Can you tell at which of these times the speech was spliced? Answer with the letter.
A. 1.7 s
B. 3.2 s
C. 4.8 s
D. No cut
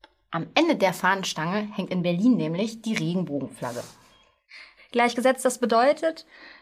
C